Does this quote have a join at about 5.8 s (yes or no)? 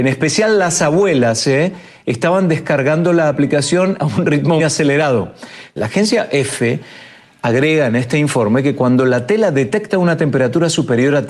yes